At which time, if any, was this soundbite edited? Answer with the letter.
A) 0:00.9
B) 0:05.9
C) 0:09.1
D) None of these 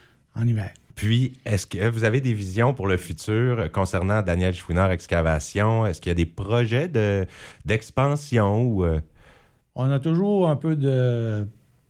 A